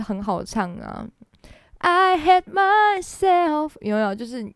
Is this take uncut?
yes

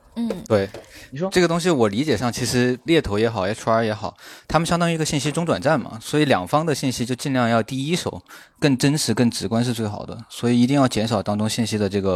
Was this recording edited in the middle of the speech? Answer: no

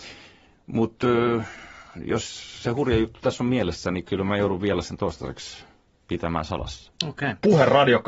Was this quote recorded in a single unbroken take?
no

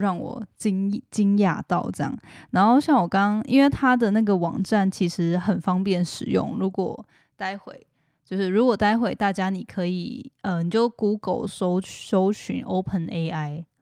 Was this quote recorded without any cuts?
yes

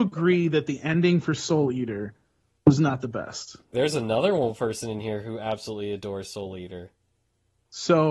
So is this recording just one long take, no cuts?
no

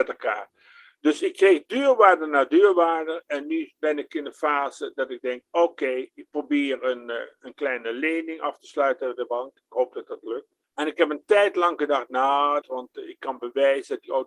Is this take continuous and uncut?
no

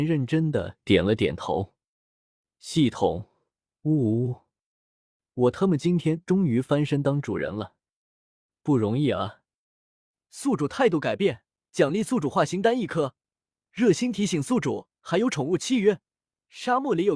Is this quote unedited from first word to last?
no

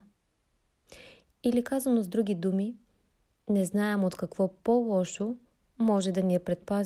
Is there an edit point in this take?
no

